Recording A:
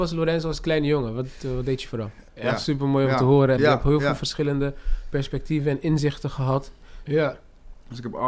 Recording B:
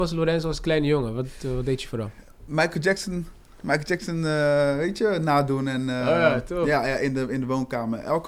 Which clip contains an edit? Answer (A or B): A